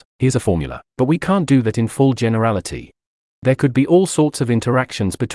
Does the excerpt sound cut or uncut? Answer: uncut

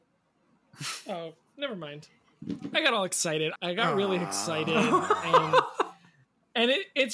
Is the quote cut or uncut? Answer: cut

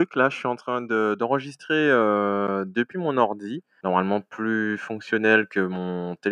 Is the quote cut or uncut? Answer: cut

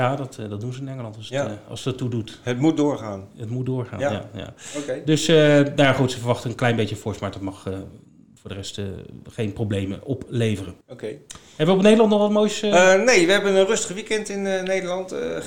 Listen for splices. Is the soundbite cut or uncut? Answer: uncut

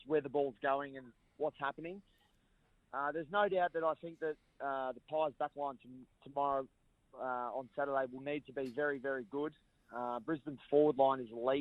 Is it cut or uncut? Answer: uncut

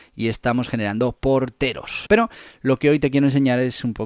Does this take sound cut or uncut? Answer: cut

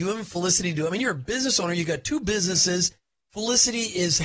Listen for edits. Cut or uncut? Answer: uncut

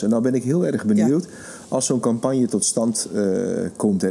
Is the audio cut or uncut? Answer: uncut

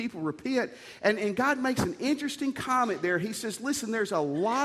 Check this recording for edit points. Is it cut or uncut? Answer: uncut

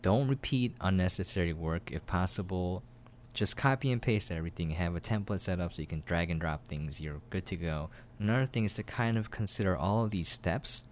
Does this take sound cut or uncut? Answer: cut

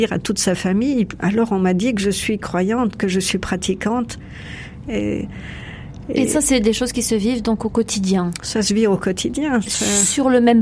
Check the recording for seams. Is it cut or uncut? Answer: cut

